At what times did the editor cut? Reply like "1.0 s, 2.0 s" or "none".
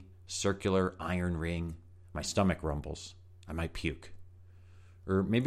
2.0 s